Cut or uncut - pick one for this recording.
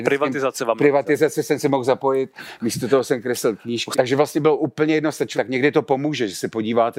cut